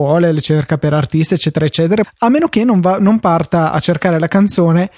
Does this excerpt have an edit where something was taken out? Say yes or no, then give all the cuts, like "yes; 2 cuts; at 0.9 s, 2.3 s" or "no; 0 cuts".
yes; 1 cut; at 2.0 s